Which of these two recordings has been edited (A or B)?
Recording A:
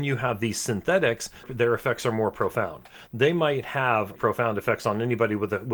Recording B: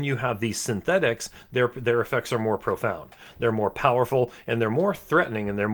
A